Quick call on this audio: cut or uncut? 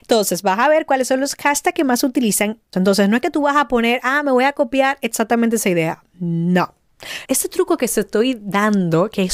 cut